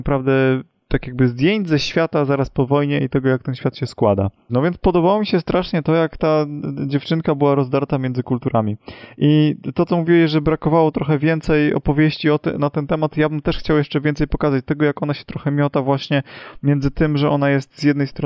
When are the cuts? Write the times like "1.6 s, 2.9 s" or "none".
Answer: 4.5 s